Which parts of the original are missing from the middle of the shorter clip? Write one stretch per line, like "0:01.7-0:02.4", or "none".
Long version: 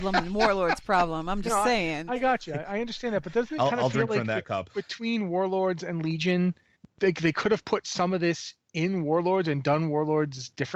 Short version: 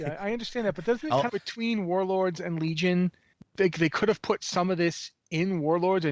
0:03.8-0:04.7